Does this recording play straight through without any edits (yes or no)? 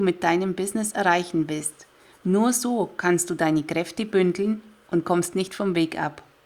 yes